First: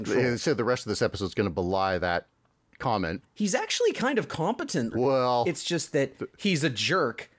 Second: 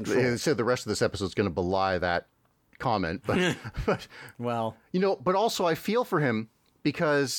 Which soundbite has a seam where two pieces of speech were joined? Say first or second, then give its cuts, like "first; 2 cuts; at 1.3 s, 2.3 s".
first; 2 cuts; at 3.2 s, 4.9 s